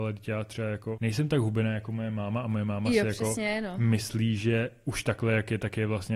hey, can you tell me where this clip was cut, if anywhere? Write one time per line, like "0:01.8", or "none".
0:01.0